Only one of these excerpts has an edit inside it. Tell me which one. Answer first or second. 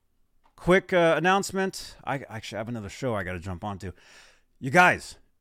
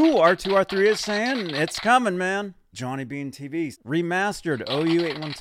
second